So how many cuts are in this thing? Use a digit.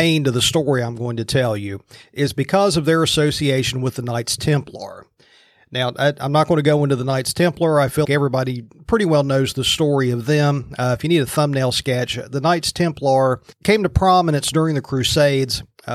1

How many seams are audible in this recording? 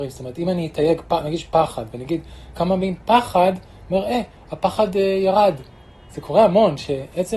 0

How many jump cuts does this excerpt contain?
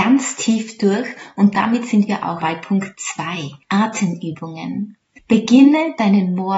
1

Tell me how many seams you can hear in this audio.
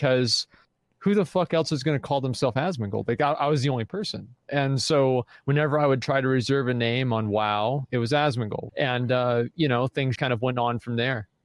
2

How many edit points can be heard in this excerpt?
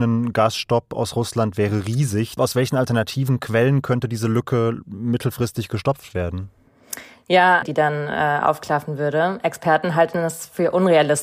2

